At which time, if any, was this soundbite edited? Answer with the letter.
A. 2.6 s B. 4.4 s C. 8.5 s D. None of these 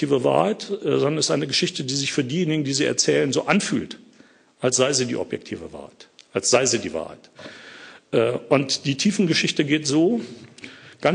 D